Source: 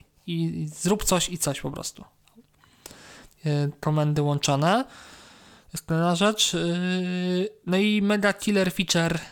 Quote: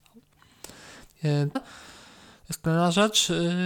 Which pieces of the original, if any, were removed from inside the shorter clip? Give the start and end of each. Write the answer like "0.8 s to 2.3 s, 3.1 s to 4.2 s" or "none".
3.8 s to 4.8 s